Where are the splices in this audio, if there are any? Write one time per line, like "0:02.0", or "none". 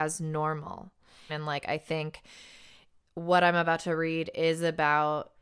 0:01.3